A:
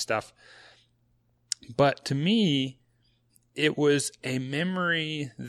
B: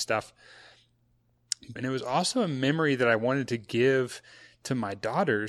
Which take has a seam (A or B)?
B